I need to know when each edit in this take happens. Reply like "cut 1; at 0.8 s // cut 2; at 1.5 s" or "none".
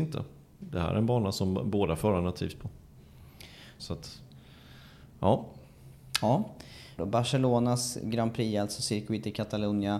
cut 1; at 3.8 s // cut 2; at 7.0 s